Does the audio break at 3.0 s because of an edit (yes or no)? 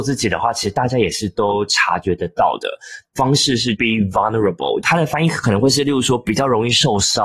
yes